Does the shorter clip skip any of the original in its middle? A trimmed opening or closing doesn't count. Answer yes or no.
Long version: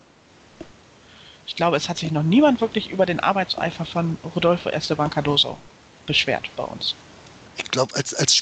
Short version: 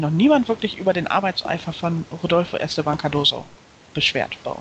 no